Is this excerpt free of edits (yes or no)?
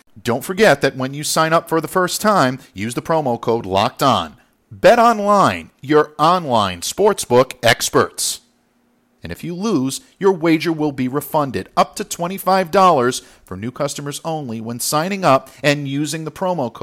no